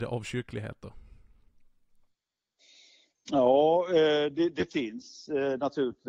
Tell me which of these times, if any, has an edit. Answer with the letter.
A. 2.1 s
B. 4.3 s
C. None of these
C